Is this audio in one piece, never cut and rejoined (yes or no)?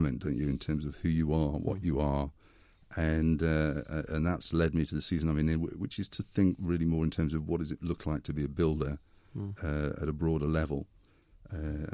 yes